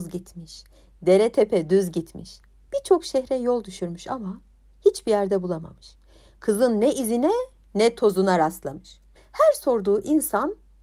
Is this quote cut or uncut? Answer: cut